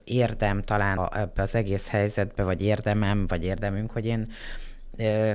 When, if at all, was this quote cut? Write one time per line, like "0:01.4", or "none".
0:01.0